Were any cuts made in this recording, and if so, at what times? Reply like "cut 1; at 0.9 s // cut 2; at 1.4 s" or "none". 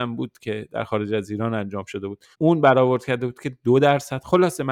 cut 1; at 2.3 s

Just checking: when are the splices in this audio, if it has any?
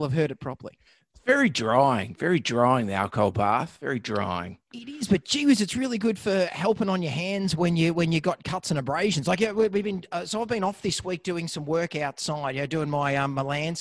none

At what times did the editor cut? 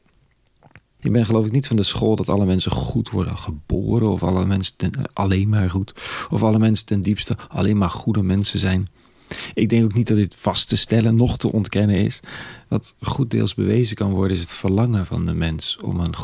cut 1; at 1.0 s

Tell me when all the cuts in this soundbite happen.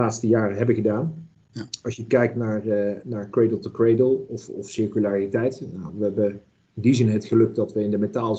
none

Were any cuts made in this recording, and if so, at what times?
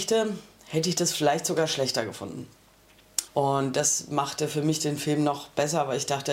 cut 1; at 3.3 s

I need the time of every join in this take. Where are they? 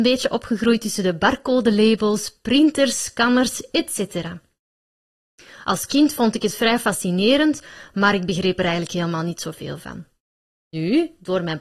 none

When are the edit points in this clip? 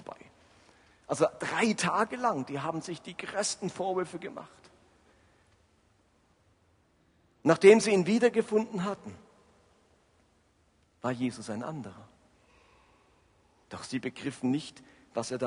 cut 1; at 13.6 s

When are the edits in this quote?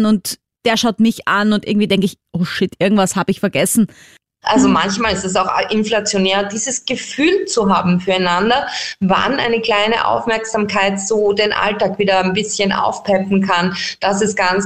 cut 1; at 4.4 s

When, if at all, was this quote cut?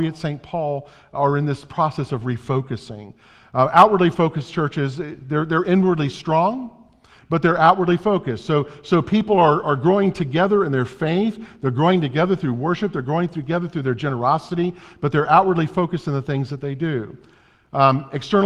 none

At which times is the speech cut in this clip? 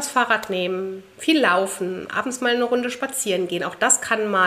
none

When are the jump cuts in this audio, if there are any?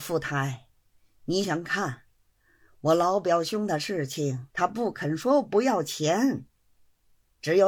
cut 1; at 1.4 s // cut 2; at 4.5 s

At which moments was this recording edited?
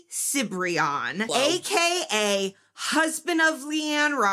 cut 1; at 1.3 s

